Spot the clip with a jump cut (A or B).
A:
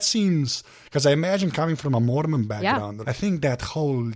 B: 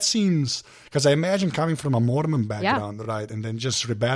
A